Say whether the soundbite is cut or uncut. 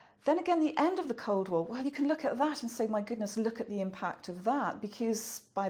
uncut